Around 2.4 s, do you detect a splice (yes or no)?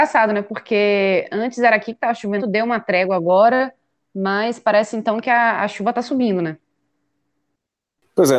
yes